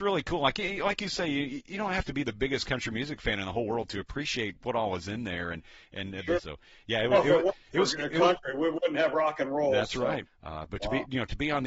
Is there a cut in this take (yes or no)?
yes